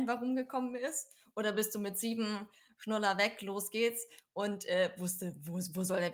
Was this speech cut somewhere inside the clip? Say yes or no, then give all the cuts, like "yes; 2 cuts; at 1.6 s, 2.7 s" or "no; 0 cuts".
no; 0 cuts